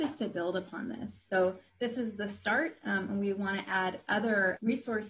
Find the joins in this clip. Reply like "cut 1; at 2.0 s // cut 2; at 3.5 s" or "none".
none